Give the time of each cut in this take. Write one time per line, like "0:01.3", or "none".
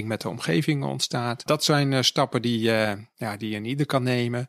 none